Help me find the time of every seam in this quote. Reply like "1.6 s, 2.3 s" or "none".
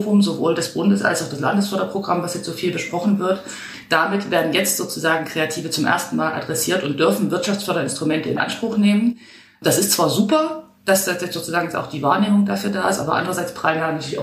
none

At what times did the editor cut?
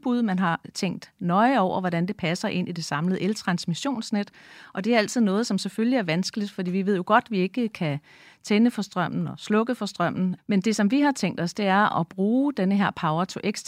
10.4 s

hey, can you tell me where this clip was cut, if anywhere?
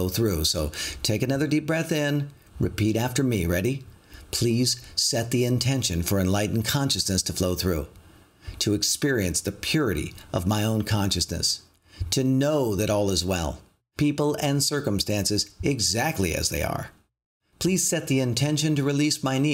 14.0 s

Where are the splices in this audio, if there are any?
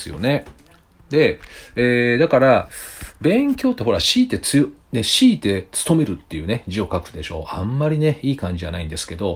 none

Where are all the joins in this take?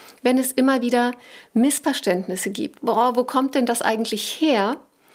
2.8 s

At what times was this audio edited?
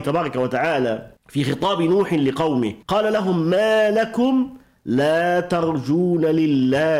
1.2 s, 2.8 s

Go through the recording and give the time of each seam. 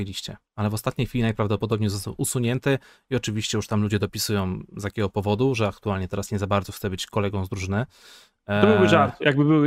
none

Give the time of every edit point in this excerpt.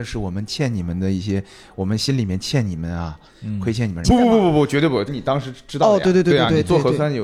4.0 s, 5.1 s

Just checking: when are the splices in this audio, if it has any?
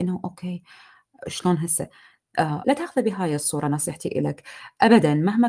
2.6 s

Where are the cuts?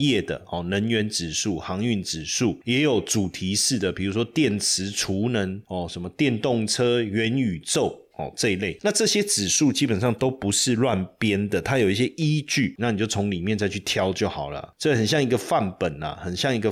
12.8 s

